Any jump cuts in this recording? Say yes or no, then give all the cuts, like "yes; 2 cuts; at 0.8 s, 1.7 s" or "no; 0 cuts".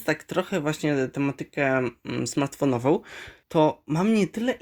no; 0 cuts